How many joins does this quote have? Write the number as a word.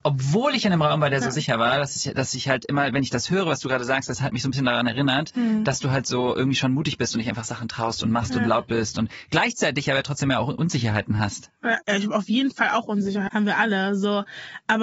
two